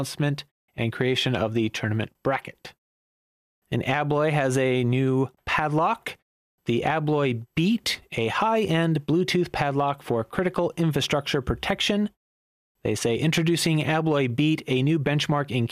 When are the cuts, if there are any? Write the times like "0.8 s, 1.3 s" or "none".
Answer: none

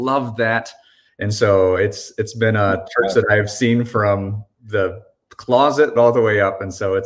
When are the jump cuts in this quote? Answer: 1.1 s, 6.0 s

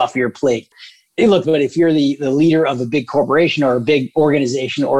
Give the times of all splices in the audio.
1.4 s

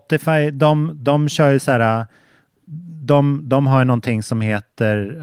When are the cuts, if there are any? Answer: none

